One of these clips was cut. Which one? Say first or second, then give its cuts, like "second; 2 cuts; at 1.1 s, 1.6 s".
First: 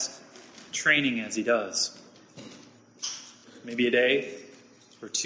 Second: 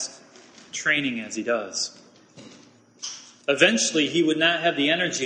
second; 1 cut; at 3.4 s